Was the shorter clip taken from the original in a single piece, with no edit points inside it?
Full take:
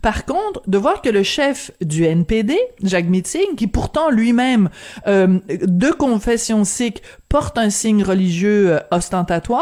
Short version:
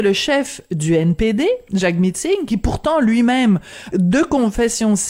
no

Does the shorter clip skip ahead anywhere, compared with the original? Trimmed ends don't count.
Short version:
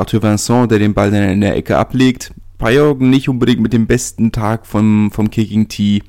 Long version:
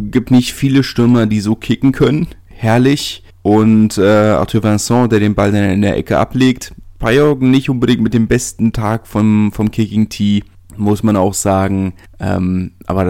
no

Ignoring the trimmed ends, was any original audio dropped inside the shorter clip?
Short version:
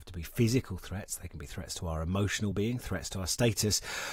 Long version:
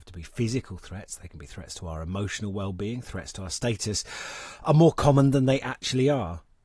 yes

